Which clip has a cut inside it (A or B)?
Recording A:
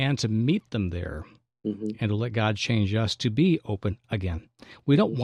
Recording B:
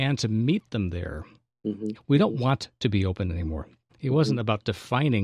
B